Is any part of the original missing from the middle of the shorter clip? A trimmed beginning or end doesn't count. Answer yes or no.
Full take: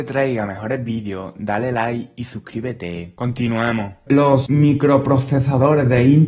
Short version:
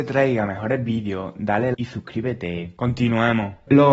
yes